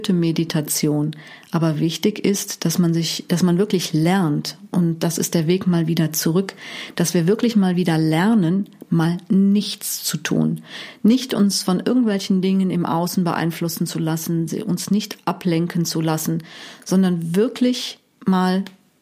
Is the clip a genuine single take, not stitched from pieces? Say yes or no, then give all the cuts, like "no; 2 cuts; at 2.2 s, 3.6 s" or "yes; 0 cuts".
yes; 0 cuts